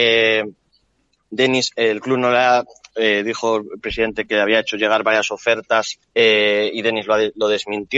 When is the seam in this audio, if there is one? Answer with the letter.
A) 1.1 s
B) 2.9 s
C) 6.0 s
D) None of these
C